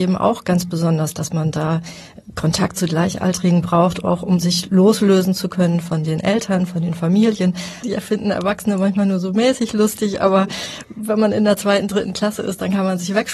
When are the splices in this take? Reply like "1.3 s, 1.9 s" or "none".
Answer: 7.8 s